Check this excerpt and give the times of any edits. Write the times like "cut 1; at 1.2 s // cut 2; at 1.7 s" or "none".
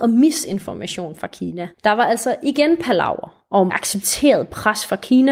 cut 1; at 1.7 s // cut 2; at 3.7 s